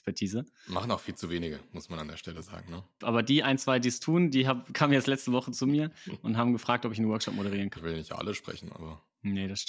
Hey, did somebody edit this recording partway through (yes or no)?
yes